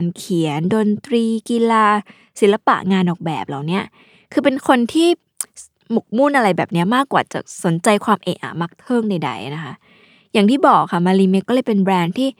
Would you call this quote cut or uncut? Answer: cut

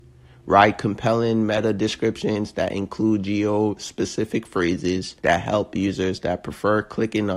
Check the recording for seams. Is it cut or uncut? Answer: cut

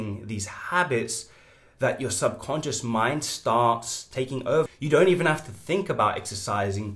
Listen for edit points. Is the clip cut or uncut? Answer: cut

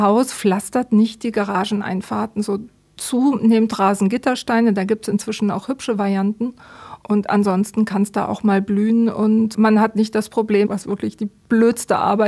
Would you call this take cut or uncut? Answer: cut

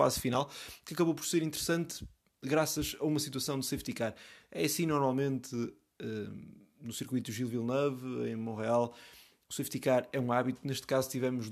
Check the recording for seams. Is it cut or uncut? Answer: uncut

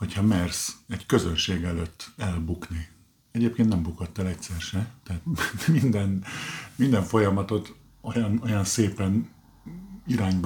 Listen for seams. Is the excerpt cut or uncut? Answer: uncut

